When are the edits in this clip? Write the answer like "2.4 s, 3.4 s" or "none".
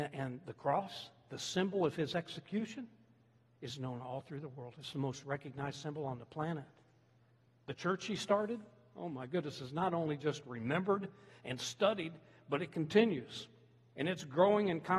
none